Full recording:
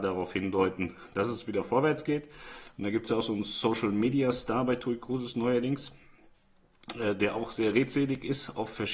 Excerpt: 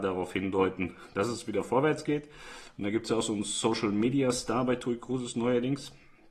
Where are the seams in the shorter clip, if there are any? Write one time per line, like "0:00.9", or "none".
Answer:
none